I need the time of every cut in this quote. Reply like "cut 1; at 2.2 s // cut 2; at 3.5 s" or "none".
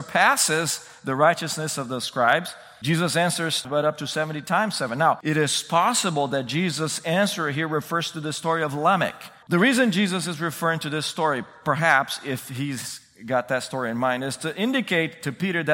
cut 1; at 3.6 s // cut 2; at 9.4 s